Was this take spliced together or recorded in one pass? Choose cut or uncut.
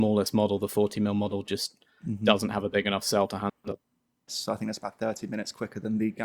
cut